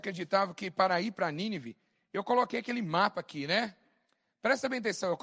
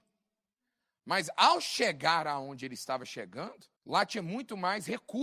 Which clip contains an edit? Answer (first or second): second